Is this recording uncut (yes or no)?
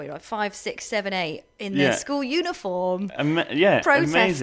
yes